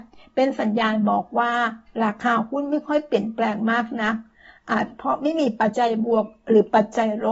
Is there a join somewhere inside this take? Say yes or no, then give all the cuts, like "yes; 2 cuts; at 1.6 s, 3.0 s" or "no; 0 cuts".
yes; 1 cut; at 5.7 s